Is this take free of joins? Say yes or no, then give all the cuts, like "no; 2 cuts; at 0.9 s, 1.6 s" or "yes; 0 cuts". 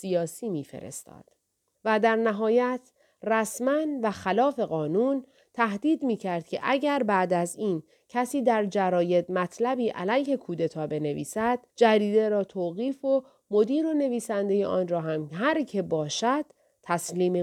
no; 2 cuts; at 1.7 s, 11.7 s